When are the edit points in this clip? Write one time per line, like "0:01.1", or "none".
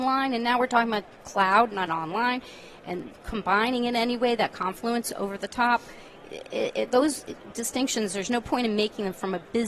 0:01.9